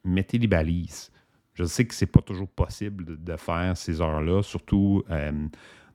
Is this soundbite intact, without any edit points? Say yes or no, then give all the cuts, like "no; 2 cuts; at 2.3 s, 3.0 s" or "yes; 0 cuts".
yes; 0 cuts